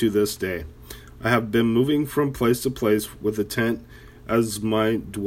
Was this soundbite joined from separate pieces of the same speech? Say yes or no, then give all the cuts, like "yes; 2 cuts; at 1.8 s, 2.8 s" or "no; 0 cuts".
no; 0 cuts